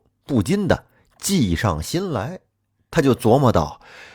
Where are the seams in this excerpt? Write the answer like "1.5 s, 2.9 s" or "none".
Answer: none